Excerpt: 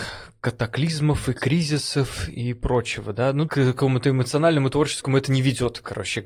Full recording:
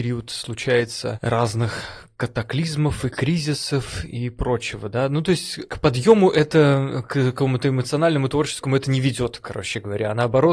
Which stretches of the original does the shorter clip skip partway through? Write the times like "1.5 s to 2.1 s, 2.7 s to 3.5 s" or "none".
5.2 s to 7.1 s